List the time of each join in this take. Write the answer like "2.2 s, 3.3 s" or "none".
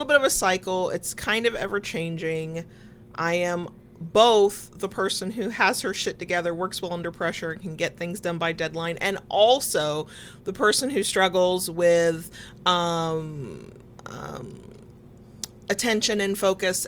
none